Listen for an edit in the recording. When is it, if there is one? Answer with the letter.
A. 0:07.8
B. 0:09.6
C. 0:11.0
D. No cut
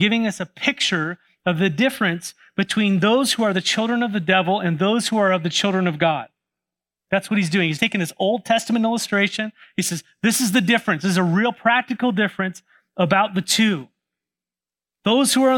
A